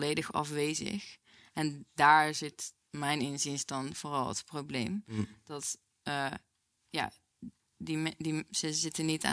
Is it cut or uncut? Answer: uncut